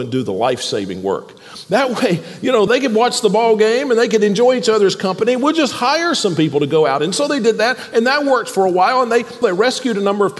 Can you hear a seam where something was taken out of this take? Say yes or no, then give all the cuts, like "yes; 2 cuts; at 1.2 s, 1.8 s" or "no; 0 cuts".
yes; 2 cuts; at 2.7 s, 9.4 s